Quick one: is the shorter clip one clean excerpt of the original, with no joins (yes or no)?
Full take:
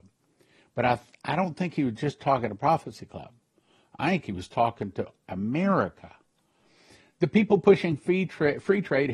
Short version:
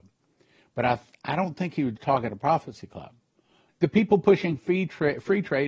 no